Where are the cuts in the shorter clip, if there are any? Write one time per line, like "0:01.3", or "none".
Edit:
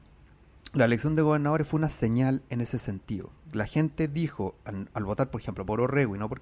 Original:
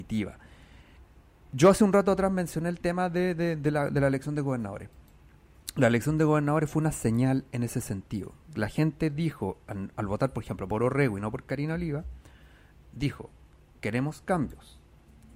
none